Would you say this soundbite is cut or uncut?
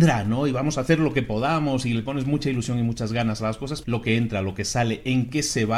cut